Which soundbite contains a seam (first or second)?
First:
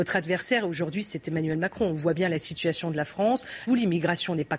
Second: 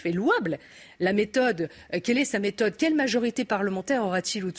first